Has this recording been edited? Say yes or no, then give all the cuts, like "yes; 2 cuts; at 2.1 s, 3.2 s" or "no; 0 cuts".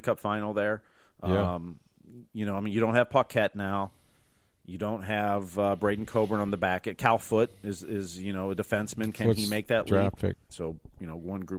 yes; 1 cut; at 10.5 s